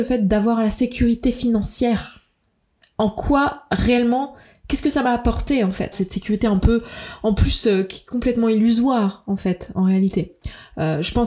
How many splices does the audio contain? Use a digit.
1